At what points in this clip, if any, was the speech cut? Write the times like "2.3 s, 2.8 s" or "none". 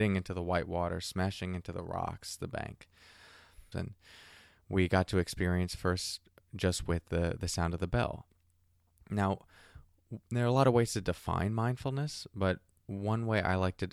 3.7 s